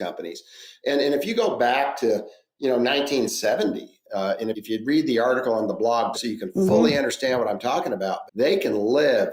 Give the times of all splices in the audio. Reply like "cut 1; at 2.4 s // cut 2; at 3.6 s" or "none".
cut 1; at 4.5 s // cut 2; at 6.1 s // cut 3; at 8.3 s